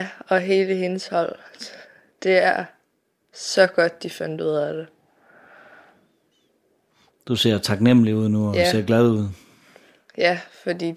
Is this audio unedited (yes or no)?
yes